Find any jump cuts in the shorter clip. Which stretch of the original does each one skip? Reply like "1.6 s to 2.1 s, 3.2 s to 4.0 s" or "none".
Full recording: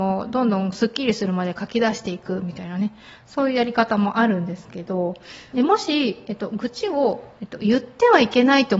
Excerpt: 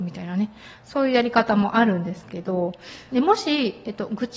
none